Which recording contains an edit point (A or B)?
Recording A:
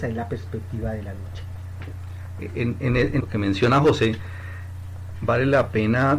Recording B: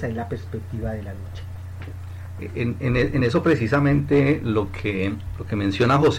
A